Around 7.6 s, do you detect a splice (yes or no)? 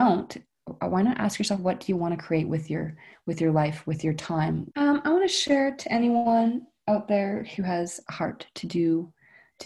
yes